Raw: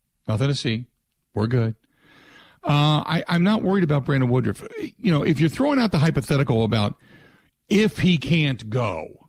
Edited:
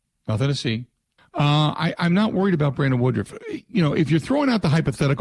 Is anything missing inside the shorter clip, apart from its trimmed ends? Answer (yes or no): yes